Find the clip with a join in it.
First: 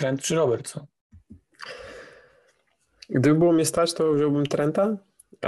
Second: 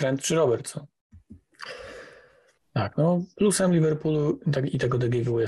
second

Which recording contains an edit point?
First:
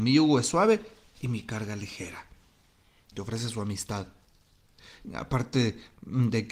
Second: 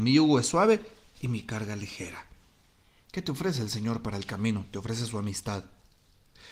first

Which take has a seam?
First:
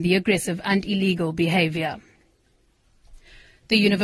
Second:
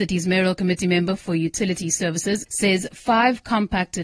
second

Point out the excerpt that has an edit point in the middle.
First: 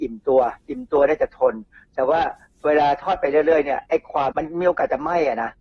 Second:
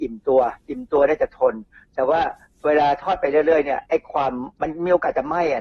first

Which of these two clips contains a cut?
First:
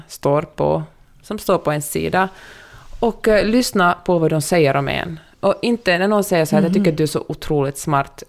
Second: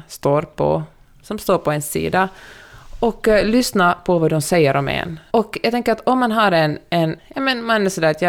second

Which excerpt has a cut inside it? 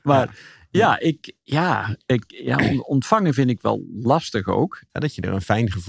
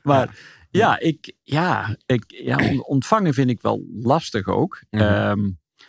first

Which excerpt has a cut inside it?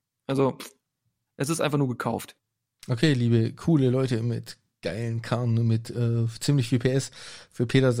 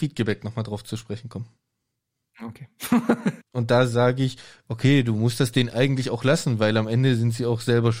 second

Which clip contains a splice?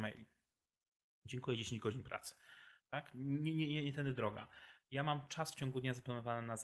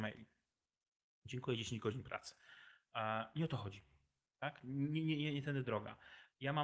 first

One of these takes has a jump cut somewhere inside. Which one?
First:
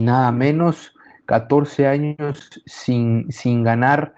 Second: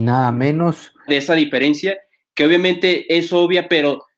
second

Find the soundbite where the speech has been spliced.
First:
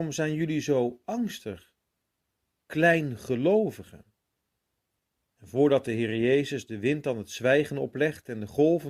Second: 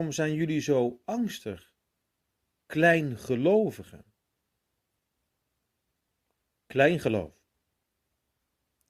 first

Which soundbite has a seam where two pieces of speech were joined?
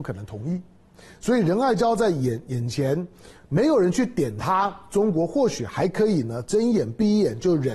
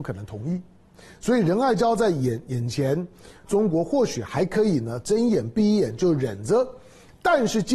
second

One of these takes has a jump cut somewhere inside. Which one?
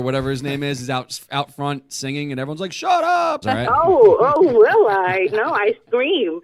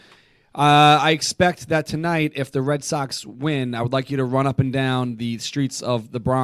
first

